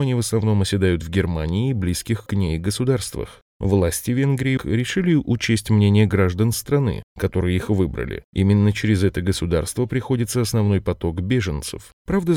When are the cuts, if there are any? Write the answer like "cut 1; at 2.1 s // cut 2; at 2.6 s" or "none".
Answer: cut 1; at 4.6 s // cut 2; at 8.3 s